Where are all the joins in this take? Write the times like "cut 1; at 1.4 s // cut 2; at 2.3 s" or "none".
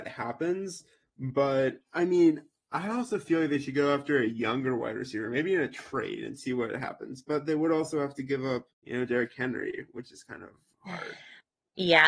cut 1; at 8.7 s